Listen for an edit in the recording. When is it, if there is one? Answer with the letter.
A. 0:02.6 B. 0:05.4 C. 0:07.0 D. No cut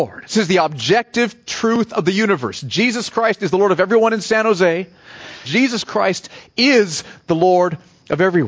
B